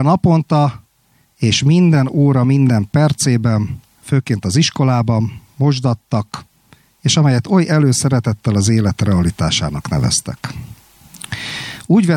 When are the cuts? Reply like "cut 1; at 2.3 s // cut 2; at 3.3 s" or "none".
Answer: cut 1; at 3.9 s